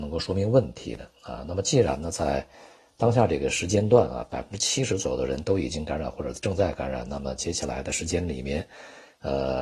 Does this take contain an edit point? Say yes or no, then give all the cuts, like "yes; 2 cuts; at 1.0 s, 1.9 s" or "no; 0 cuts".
no; 0 cuts